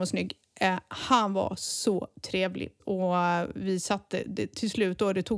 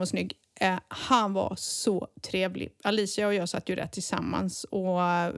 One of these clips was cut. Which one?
first; 1 cut; at 2.8 s

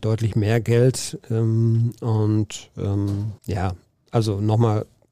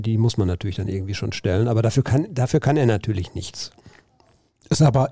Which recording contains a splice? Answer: first; 1 cut; at 3.4 s

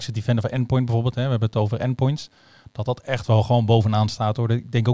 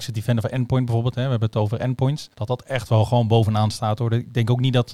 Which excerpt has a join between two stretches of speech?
second; 1 cut; at 2.3 s

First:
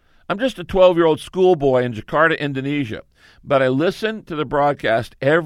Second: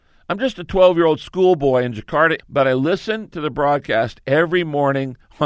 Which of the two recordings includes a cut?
second; 1 cut; at 2.4 s

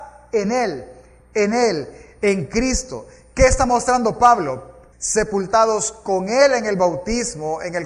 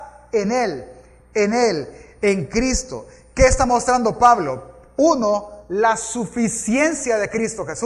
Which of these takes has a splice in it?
first; 1 cut; at 4.9 s

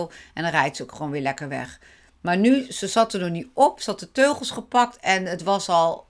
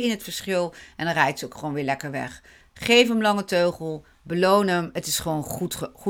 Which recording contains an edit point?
second; 1 cut; at 2.6 s

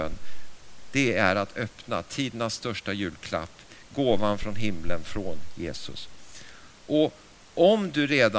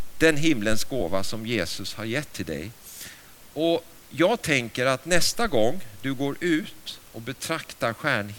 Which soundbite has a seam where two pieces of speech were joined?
second; 1 cut; at 3.4 s

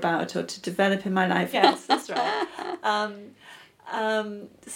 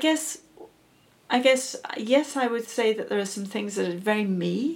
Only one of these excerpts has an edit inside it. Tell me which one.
first; 1 cut; at 1.5 s

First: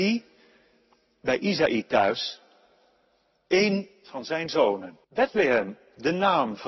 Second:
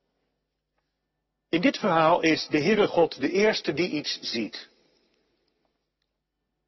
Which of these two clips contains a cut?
first; 1 cut; at 5.0 s

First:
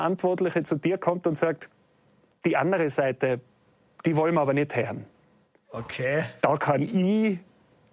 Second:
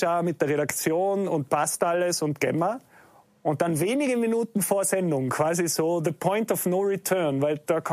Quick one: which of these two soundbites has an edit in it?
first; 1 cut; at 6.4 s

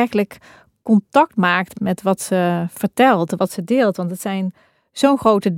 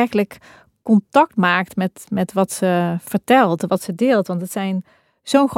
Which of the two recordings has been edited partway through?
first; 1 cut; at 1.7 s

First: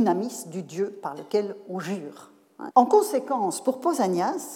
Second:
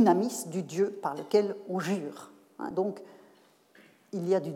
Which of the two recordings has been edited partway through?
first; 1 cut; at 2.7 s

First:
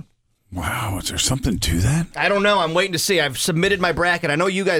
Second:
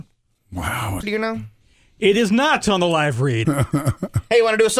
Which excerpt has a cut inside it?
second; 2 cuts; at 1.0 s, 3.4 s

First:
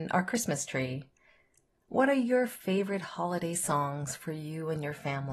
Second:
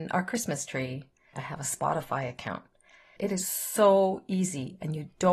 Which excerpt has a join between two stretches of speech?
second; 2 cuts; at 1.3 s, 3.2 s

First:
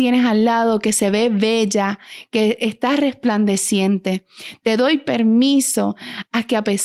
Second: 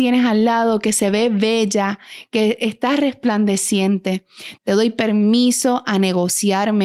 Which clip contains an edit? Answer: second; 1 cut; at 4.6 s

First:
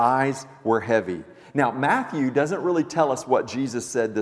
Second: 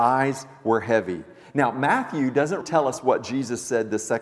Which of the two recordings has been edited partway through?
second; 1 cut; at 2.6 s

